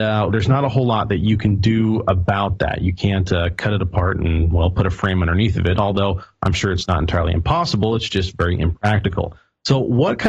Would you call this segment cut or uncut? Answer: uncut